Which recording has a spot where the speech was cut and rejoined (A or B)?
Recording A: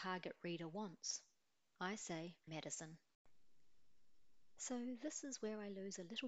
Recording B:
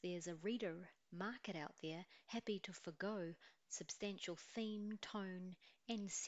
A